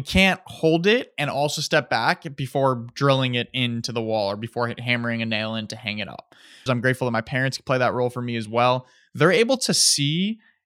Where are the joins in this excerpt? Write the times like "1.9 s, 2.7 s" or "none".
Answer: 6.7 s

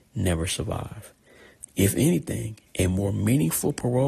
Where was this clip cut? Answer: 1.7 s

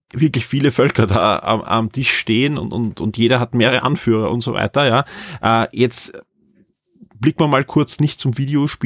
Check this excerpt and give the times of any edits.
none

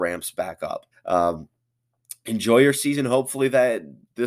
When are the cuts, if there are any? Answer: 0.9 s

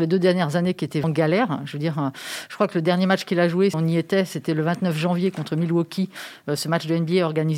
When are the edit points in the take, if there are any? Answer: 1.0 s, 3.7 s

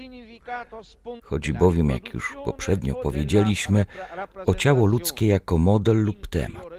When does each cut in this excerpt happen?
1.2 s

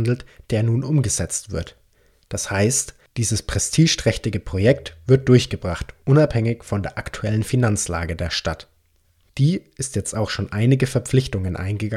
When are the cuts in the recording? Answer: none

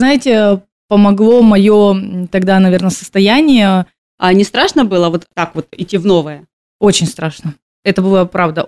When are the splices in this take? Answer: 4.0 s

